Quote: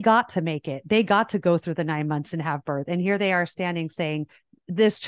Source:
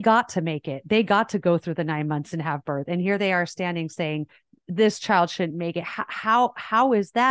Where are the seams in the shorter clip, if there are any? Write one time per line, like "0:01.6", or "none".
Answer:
none